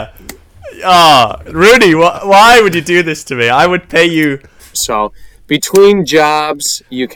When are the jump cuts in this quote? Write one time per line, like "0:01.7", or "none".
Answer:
0:04.7